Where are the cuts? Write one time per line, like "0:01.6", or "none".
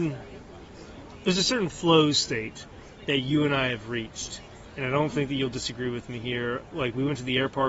none

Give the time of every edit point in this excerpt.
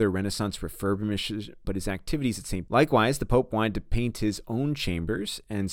0:01.6
0:02.7

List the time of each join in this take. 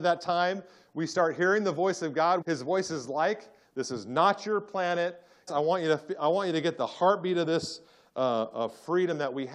0:02.4
0:03.6
0:05.5

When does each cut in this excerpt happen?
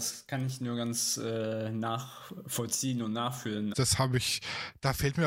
0:03.7

